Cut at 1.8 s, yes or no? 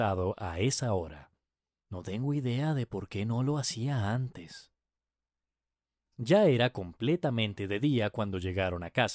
yes